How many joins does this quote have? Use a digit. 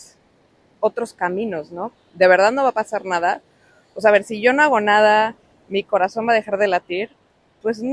1